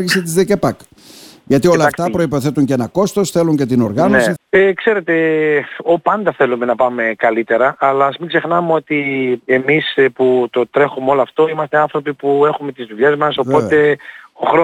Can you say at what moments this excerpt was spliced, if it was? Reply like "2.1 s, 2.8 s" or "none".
4.4 s, 13.4 s